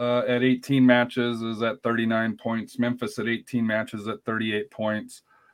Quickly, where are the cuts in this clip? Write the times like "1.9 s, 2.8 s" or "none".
none